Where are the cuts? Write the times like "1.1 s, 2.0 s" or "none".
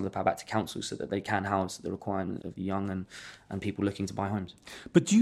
2.4 s